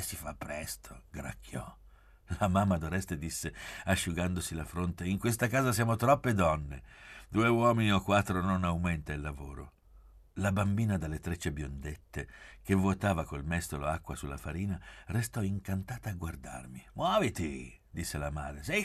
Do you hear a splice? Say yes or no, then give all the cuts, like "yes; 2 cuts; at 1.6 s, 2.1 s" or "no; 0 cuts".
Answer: no; 0 cuts